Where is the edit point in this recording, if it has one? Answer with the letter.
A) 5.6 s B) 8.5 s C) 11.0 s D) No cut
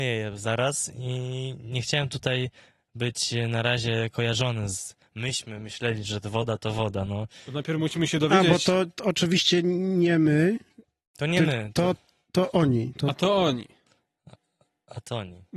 D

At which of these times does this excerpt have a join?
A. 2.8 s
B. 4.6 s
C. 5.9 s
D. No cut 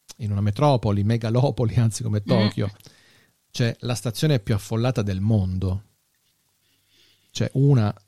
A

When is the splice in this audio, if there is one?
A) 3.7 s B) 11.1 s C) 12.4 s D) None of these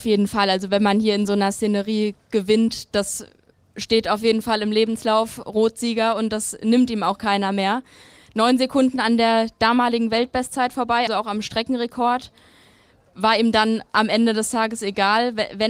B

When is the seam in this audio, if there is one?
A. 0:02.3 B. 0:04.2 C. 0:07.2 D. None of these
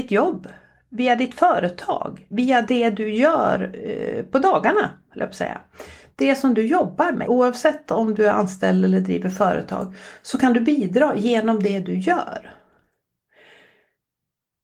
C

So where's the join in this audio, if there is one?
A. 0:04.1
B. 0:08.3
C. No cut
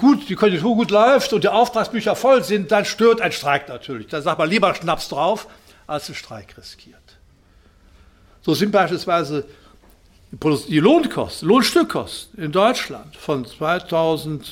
C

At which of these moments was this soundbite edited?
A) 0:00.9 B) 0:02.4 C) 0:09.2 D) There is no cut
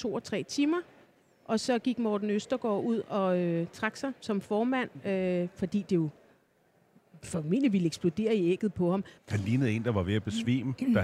C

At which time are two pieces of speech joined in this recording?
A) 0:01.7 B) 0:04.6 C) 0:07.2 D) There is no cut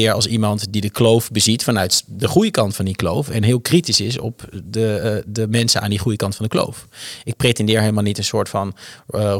D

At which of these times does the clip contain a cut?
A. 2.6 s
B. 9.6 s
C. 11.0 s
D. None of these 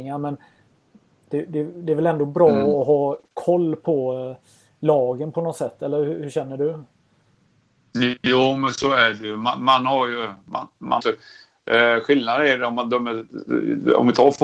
C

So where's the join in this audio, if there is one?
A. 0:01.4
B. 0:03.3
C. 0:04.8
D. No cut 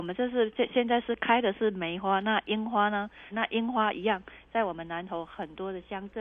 B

